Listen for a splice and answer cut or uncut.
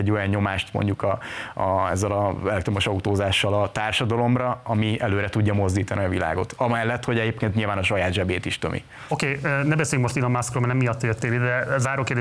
uncut